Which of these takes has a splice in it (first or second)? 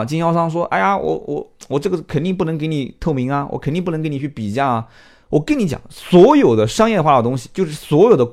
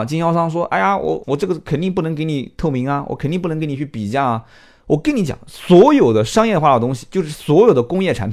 second